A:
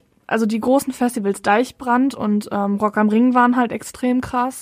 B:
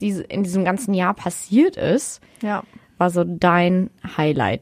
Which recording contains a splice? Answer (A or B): B